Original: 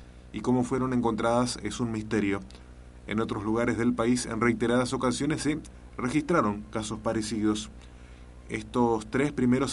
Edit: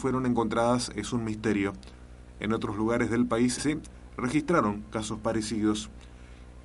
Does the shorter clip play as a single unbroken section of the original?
no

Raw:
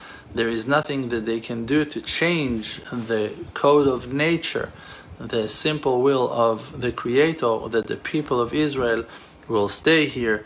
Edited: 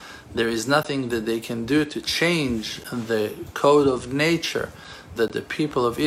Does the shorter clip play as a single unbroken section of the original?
no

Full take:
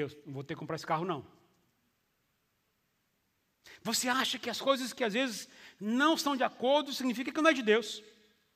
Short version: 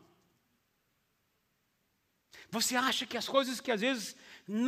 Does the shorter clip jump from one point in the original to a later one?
no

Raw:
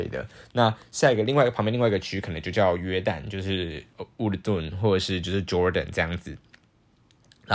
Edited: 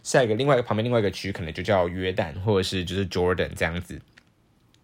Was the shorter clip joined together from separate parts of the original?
yes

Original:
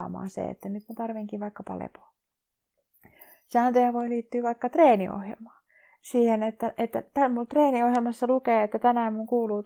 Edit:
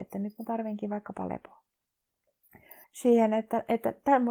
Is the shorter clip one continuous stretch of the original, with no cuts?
no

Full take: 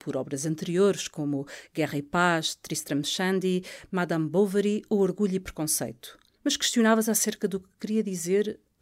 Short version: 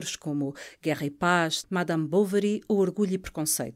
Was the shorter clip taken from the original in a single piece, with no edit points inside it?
no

